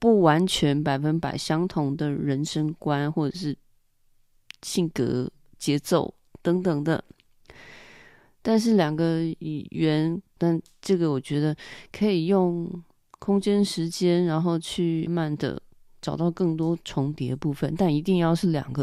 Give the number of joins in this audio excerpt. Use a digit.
2